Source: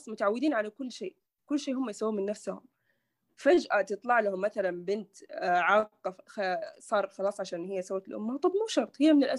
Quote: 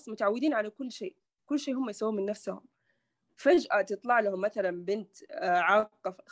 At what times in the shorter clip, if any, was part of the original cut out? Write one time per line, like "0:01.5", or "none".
none